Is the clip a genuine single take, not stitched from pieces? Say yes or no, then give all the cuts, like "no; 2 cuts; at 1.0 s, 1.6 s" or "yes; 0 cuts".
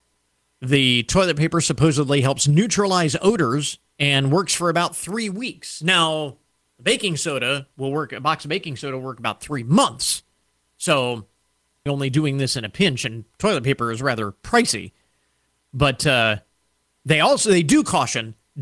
no; 2 cuts; at 3.9 s, 11.9 s